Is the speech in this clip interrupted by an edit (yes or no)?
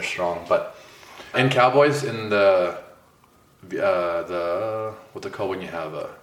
yes